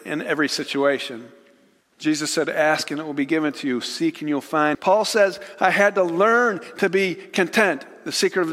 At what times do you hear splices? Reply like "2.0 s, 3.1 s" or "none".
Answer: 1.8 s, 4.7 s